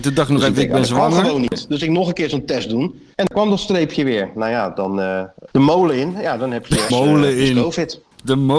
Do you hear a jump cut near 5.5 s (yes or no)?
yes